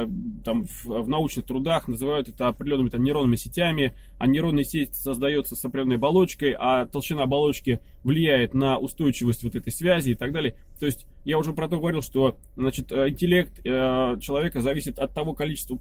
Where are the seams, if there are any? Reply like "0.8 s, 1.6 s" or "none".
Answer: none